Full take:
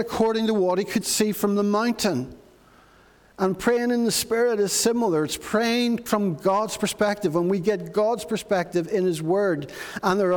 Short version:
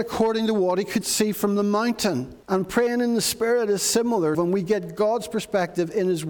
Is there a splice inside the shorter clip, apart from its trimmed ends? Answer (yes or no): yes